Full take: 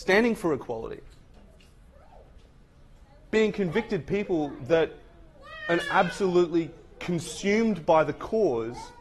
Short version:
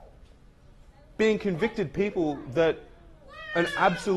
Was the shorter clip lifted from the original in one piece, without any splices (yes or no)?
yes